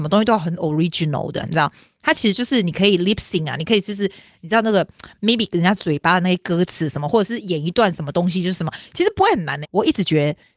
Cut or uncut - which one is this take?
cut